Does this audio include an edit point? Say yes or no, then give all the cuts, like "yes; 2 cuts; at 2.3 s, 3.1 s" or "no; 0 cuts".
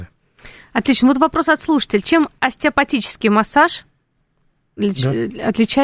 no; 0 cuts